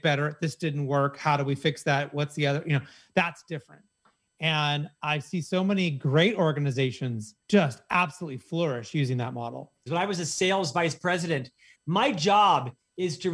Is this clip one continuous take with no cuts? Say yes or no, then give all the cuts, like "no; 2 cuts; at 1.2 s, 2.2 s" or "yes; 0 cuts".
no; 3 cuts; at 7.4 s, 9.9 s, 11.7 s